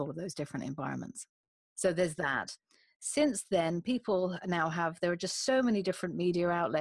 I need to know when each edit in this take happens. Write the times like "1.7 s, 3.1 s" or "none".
1.7 s